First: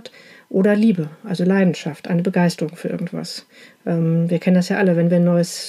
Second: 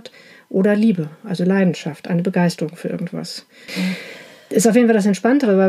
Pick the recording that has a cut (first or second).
second